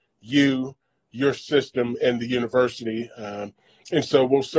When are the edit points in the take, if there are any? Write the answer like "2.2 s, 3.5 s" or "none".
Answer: none